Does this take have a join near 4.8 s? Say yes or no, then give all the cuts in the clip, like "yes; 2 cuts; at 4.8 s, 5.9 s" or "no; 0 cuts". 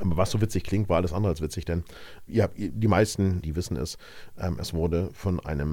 no; 2 cuts; at 2.3 s, 3.4 s